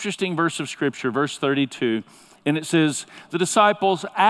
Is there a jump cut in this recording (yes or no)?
no